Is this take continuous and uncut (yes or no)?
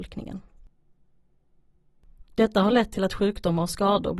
no